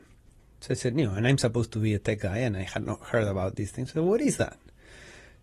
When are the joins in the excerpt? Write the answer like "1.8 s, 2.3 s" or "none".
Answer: 2.3 s